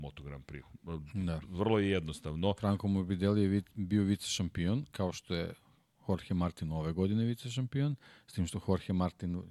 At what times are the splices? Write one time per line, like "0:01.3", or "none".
none